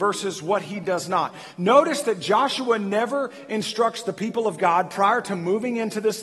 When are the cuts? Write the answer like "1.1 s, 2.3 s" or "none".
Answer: none